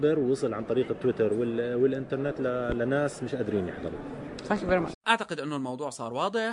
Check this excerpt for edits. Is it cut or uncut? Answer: cut